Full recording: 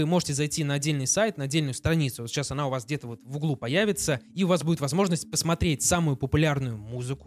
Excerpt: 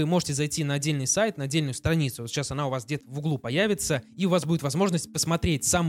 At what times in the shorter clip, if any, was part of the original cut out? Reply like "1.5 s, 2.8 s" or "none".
3.0 s